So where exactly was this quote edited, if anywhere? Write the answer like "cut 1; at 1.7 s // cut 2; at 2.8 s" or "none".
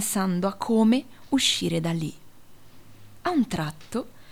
none